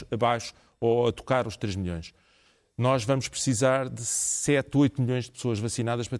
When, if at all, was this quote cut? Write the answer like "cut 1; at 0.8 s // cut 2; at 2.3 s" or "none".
none